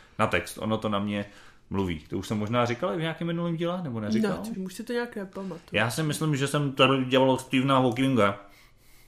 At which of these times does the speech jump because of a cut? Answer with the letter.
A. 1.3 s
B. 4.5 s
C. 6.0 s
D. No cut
B